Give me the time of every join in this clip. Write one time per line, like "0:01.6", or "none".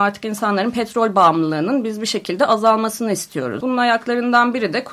0:03.6